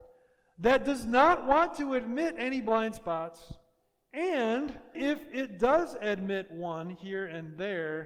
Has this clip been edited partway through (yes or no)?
yes